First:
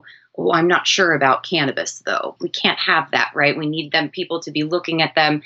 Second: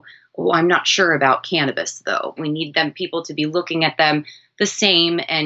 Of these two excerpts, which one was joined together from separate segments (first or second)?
second